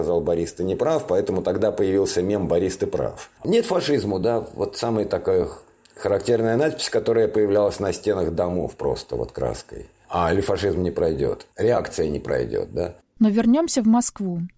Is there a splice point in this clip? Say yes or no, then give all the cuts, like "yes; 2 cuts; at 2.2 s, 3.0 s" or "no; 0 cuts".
yes; 1 cut; at 13.0 s